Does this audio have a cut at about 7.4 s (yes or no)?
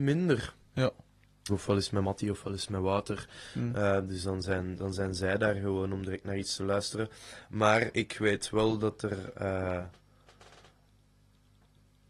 no